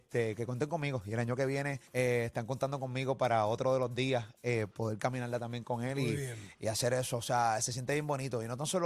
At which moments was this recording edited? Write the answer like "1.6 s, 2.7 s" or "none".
1.9 s

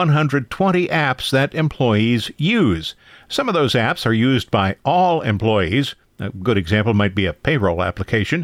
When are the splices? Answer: none

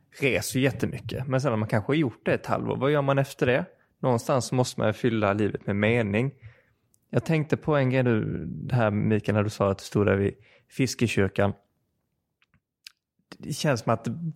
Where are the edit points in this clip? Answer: none

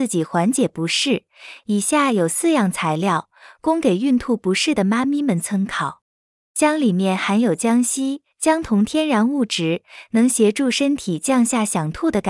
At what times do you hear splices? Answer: 6.4 s

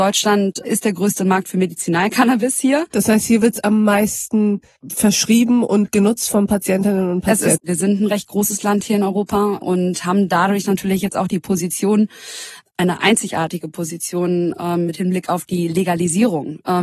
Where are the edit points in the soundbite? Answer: 7.6 s

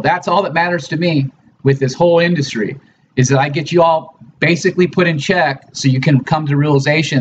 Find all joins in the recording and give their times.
none

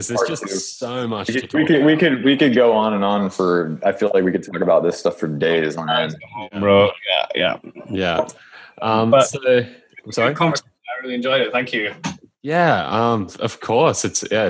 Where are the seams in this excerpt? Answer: none

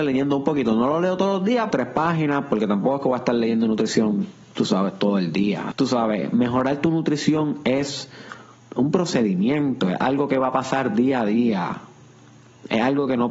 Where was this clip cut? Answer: 1.7 s, 5.7 s

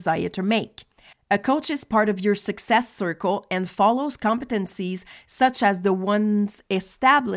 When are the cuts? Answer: 1.1 s

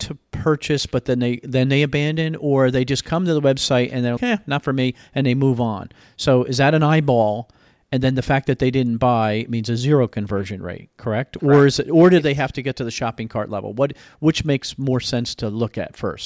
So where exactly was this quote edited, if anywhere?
4.2 s

